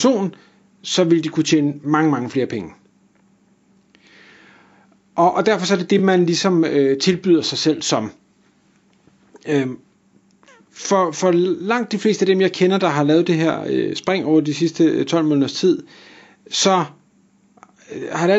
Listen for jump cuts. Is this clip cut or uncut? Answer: uncut